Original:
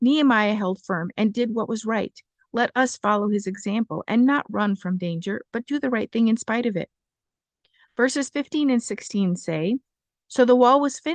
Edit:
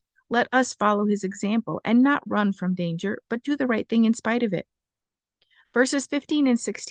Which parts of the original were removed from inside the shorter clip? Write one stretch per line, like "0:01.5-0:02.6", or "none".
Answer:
none